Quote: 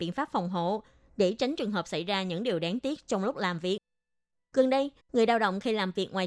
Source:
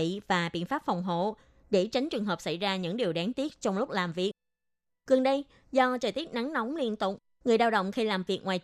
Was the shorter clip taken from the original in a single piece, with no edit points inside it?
no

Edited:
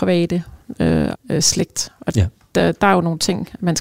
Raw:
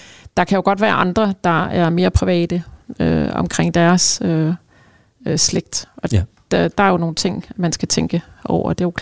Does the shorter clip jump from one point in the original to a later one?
yes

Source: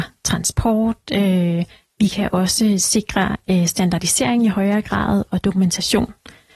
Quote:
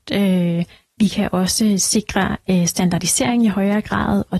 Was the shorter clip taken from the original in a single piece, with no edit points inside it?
yes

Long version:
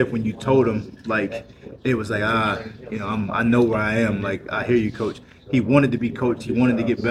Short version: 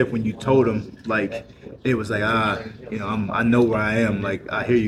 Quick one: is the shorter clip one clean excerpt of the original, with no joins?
yes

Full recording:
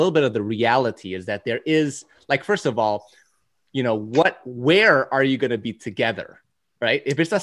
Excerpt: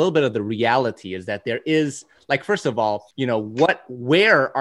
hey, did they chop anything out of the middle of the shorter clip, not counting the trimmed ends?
yes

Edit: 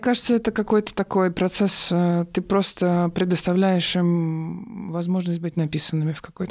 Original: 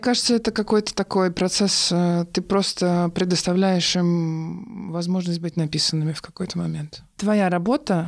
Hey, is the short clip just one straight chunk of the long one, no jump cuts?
yes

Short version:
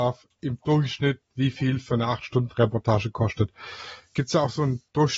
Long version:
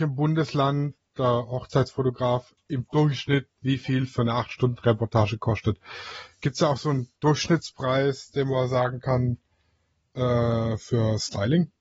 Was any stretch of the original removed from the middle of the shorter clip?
no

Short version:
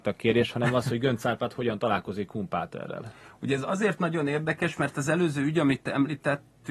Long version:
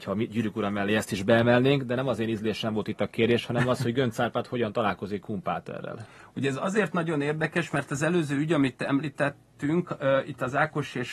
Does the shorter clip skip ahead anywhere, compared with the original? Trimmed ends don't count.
no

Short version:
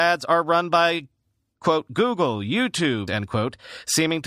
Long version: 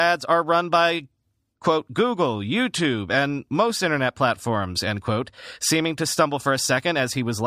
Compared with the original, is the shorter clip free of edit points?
no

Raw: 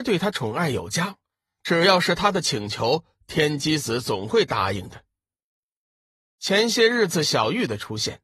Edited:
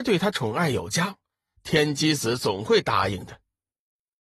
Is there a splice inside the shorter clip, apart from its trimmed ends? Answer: yes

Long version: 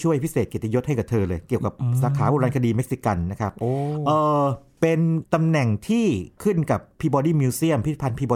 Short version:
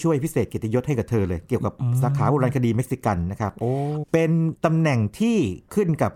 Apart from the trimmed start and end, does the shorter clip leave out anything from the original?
yes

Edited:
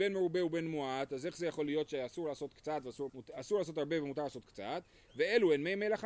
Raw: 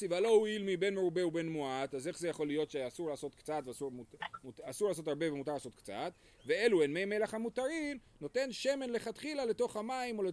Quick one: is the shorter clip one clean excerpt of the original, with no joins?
no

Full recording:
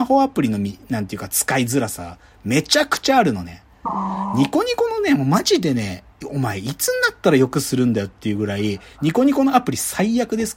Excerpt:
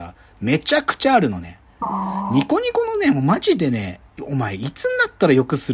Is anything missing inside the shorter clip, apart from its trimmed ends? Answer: no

